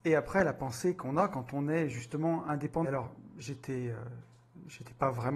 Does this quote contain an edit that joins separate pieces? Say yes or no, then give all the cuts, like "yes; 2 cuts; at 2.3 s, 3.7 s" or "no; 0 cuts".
yes; 1 cut; at 2.8 s